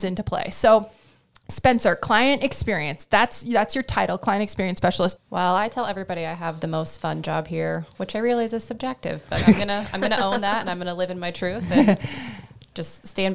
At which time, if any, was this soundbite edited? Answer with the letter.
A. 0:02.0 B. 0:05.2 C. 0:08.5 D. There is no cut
B